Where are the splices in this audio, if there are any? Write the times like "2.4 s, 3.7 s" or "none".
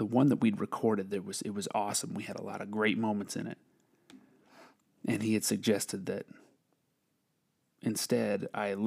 none